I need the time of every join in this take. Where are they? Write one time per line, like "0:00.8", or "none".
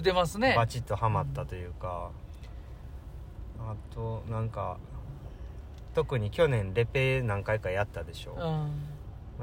0:03.5